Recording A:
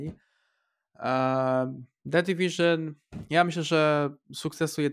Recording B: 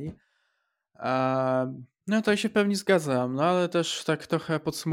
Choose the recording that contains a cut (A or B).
B